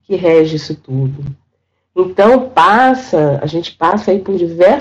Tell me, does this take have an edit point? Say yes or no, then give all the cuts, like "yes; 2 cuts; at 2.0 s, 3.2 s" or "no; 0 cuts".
no; 0 cuts